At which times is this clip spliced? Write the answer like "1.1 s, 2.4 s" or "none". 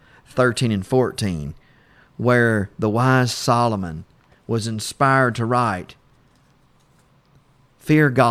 none